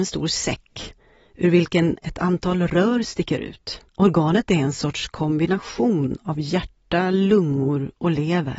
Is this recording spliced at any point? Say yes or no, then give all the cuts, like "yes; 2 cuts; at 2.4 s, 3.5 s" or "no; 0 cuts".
yes; 1 cut; at 3.9 s